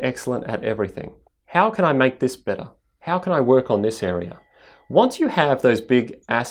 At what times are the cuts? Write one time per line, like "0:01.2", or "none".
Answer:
0:01.3